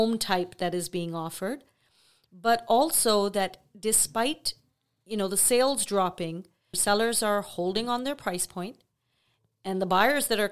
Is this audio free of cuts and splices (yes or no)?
no